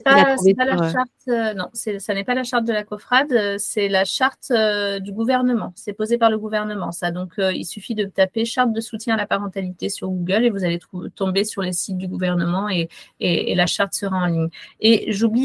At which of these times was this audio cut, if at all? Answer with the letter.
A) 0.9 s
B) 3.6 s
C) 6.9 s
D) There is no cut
D